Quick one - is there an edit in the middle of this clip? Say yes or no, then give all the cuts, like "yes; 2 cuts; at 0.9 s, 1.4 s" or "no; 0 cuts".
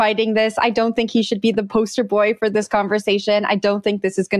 no; 0 cuts